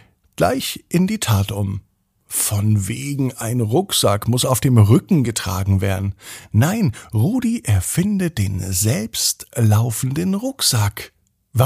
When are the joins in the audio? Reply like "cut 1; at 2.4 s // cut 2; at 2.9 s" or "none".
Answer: none